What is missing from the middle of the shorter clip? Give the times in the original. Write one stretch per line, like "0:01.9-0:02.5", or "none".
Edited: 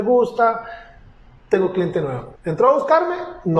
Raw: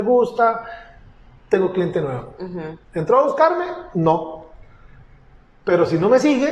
0:02.4-0:02.8